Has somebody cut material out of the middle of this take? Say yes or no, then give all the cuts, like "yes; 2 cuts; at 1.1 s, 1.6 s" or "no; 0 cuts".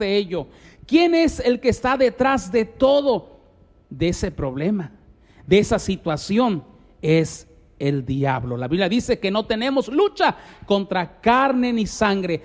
no; 0 cuts